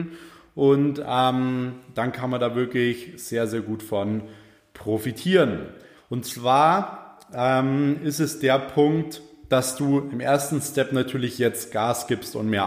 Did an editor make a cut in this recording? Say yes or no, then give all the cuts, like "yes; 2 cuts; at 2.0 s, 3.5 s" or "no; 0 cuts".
yes; 1 cut; at 6.0 s